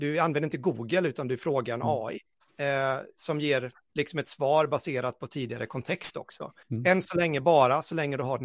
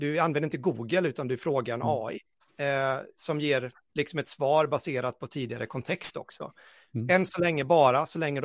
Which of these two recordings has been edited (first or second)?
first